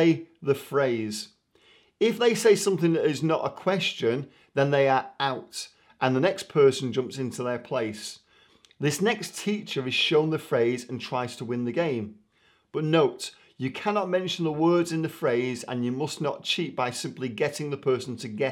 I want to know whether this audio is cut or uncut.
uncut